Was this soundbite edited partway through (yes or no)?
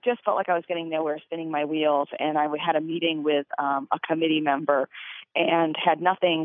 no